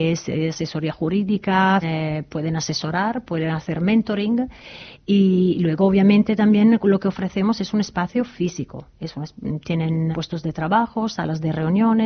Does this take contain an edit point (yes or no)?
yes